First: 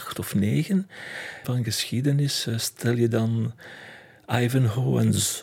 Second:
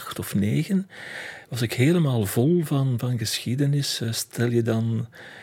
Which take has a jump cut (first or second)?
first